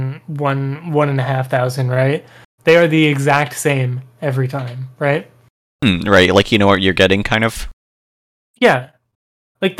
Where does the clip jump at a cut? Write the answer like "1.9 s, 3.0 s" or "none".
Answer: 2.5 s